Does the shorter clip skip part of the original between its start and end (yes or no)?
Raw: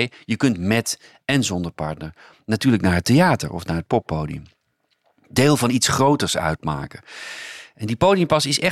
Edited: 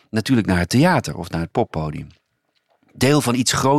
no